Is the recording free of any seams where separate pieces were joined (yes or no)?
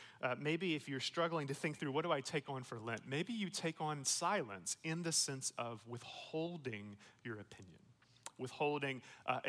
yes